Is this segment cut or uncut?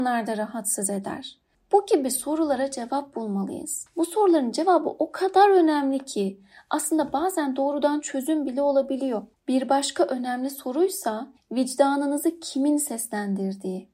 uncut